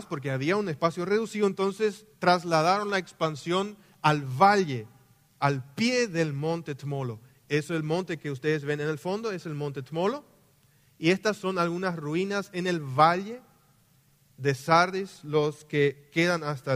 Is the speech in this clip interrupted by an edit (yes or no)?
no